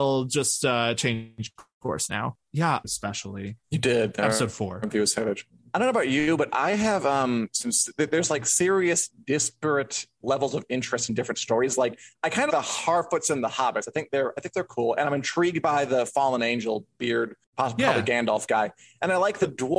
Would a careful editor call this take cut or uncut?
cut